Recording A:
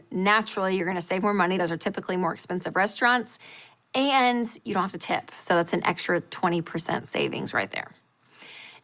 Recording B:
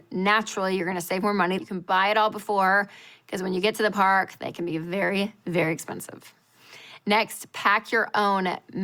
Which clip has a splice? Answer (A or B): B